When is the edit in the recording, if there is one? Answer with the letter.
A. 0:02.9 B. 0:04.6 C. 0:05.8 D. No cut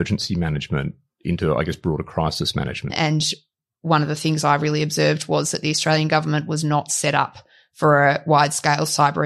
A